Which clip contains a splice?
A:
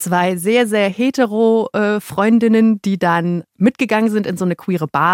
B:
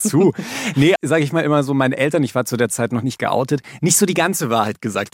B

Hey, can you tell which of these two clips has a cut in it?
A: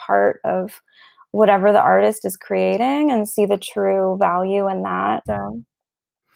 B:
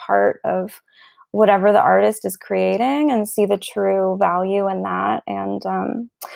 A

